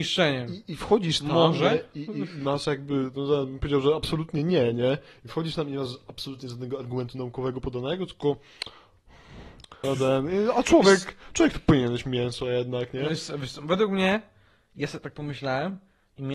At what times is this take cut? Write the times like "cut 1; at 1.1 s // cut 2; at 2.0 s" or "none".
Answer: cut 1; at 9.8 s